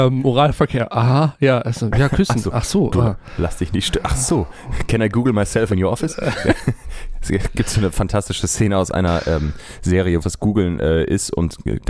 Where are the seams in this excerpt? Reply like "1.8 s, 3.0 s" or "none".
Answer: 10.2 s